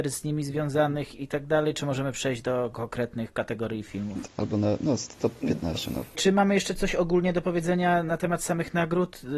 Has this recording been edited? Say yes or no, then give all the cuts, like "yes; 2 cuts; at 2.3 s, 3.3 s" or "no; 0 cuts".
yes; 2 cuts; at 4.3 s, 6.1 s